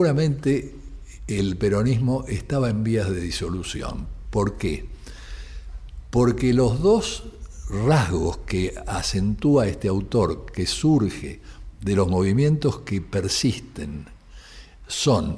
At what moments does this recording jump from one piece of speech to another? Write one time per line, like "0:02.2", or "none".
none

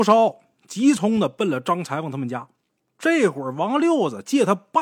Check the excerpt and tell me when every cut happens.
0:01.0
0:02.8

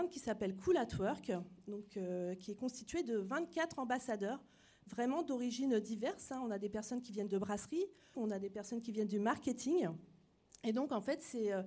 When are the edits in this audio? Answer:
0:08.1

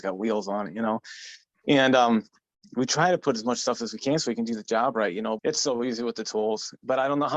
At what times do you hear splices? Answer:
0:05.4

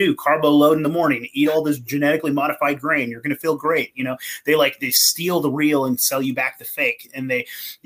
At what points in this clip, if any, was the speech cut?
none

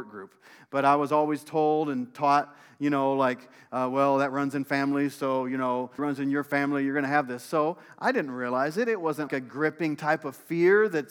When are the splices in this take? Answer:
0:06.0
0:09.3

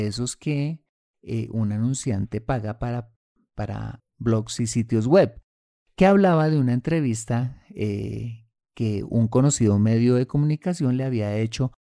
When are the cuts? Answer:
0:04.0

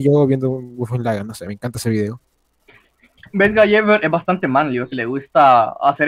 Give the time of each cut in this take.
0:03.2
0:04.9

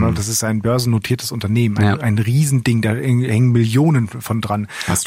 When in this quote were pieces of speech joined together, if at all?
none

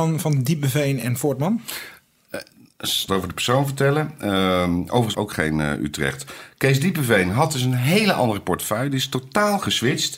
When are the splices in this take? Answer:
0:03.1
0:05.1

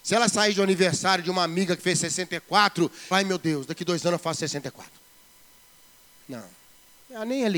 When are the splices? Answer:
0:03.1

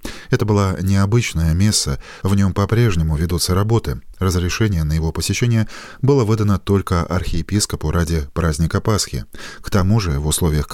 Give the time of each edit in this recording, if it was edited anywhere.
0:02.2

